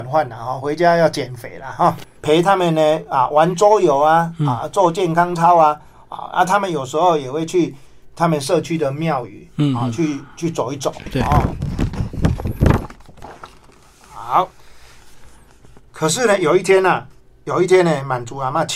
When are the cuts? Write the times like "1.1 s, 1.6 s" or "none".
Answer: 2.0 s